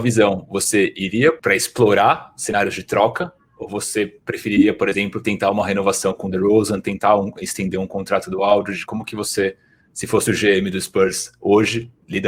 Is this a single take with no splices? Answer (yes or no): yes